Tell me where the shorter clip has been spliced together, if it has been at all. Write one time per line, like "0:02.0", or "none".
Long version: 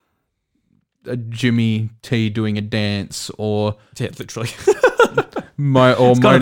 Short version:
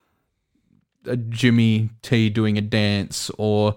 none